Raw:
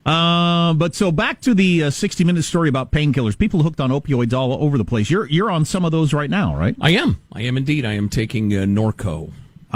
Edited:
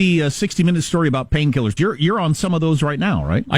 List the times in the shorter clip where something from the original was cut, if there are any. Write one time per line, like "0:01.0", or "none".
0:01.8